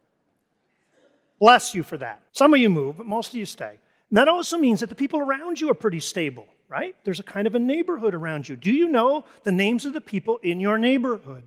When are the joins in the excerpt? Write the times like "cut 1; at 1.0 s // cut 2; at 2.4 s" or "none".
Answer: cut 1; at 2.3 s